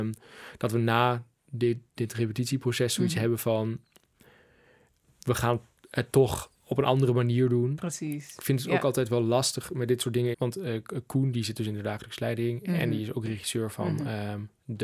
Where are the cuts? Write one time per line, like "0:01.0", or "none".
0:10.3